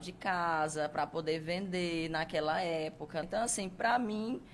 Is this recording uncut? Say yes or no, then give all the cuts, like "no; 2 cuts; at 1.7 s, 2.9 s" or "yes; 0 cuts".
no; 1 cut; at 3.2 s